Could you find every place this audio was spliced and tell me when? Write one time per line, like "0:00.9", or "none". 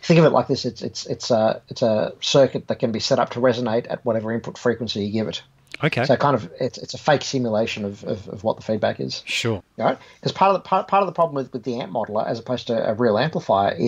0:09.6